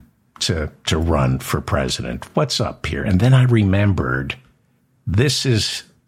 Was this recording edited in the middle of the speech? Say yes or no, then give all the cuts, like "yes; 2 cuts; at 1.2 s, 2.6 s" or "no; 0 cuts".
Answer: no; 0 cuts